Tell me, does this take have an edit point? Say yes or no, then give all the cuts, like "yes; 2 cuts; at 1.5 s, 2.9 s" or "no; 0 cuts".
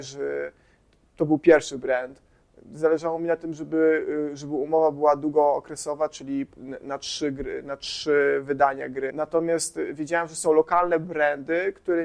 yes; 1 cut; at 9.1 s